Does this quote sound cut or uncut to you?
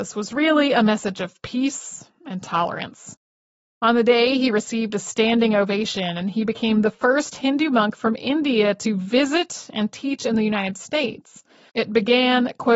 cut